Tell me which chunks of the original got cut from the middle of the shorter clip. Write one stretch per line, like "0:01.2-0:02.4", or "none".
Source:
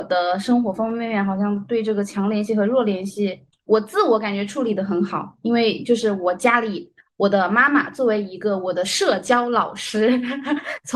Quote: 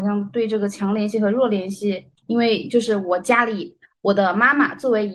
0:03.6-0:05.4